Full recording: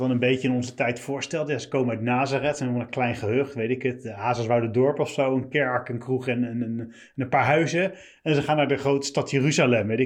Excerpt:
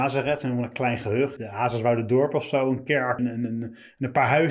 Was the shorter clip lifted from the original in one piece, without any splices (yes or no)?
no